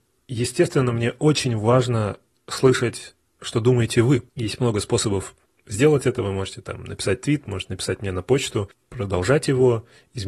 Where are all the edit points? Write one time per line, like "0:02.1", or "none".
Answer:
0:04.3
0:08.7